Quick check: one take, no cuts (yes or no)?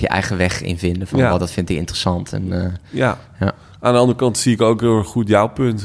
yes